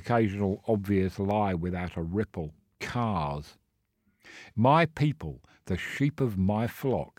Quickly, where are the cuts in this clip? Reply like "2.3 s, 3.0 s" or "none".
2.7 s, 4.5 s